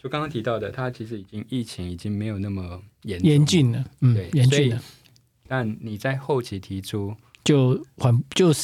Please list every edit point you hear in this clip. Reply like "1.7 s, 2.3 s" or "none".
5.5 s

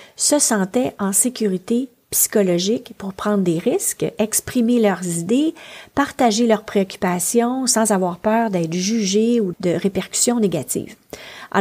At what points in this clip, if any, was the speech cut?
9.5 s

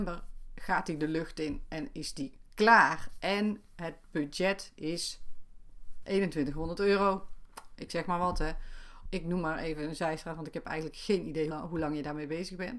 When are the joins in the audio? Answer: 9.1 s, 11.5 s

